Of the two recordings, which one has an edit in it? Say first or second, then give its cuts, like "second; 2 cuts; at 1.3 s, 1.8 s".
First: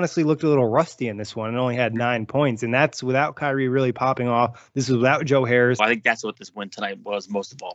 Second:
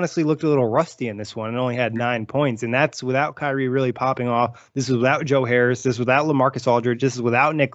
first; 1 cut; at 5.8 s